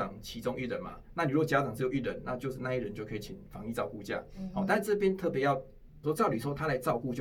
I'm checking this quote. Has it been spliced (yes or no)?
yes